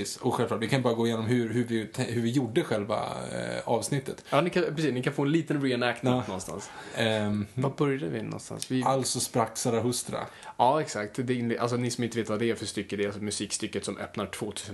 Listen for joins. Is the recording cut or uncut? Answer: uncut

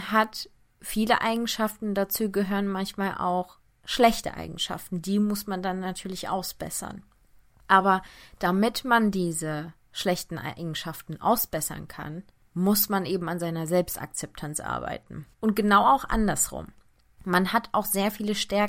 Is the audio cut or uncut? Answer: cut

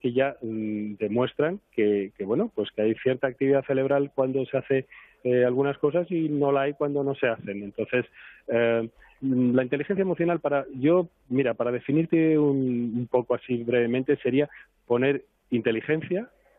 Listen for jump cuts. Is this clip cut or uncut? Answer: uncut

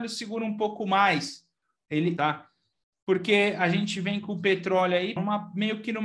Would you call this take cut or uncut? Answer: cut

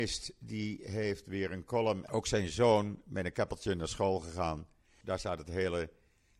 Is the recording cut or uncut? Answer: cut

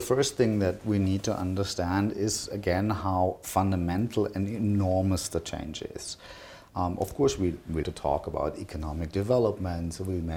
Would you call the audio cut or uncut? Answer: cut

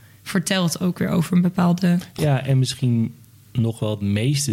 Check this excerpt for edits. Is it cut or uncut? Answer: cut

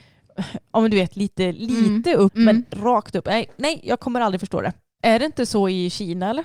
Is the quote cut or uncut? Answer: cut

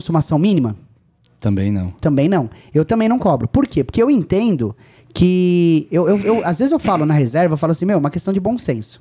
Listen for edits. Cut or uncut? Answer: uncut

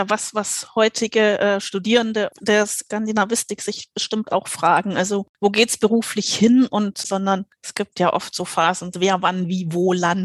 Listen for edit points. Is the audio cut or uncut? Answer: cut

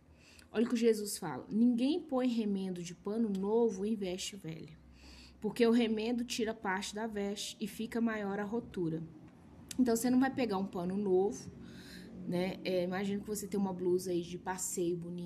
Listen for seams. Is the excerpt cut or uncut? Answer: uncut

